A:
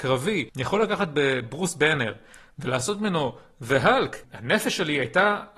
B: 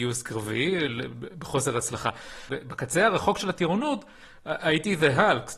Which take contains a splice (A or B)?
B